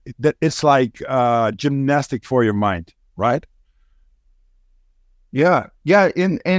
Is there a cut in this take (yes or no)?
no